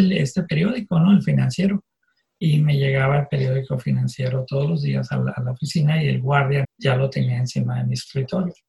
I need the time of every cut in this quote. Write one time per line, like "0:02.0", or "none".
0:02.3
0:06.6